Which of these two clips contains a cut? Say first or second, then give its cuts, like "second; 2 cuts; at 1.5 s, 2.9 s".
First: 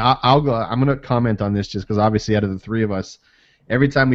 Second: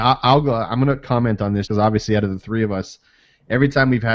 second; 1 cut; at 1.7 s